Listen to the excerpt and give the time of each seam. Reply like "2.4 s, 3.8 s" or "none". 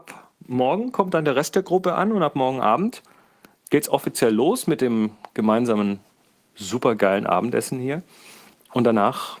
none